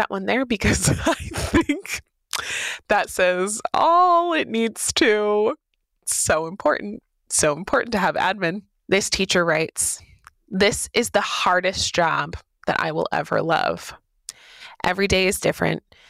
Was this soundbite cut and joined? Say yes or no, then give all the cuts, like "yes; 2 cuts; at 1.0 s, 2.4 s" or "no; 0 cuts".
yes; 1 cut; at 8.8 s